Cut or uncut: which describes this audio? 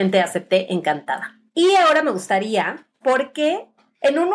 cut